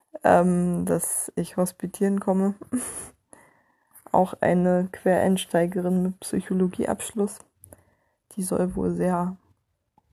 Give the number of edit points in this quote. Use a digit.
0